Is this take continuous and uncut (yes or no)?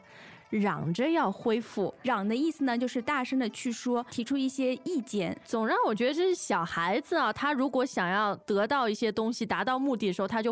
yes